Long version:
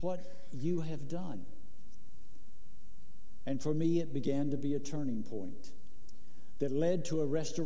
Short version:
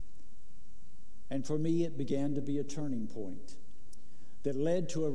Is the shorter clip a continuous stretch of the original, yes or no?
yes